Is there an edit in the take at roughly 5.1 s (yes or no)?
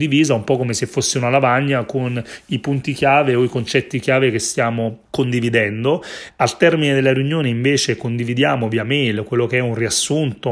yes